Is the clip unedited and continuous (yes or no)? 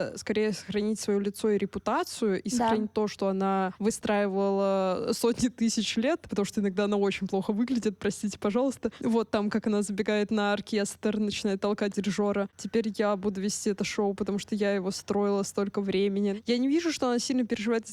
yes